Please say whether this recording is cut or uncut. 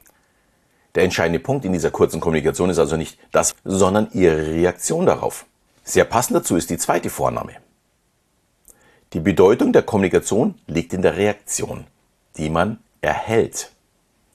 cut